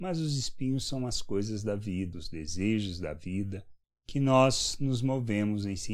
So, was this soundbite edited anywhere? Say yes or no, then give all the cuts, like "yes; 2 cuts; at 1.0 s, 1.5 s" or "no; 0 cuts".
yes; 1 cut; at 2.1 s